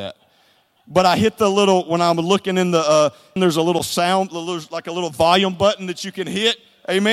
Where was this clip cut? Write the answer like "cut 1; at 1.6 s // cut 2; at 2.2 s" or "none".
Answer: cut 1; at 3.4 s